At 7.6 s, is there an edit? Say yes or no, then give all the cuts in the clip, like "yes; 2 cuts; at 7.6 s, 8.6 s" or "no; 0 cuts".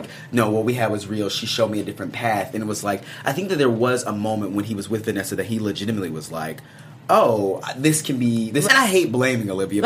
yes; 2 cuts; at 7.6 s, 8.6 s